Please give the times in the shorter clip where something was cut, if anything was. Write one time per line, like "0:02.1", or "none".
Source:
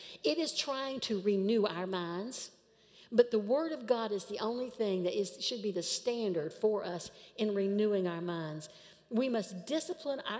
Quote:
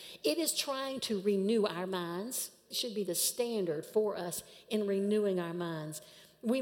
0:02.7